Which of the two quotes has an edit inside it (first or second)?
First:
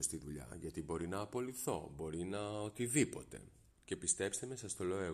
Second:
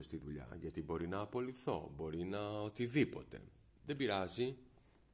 first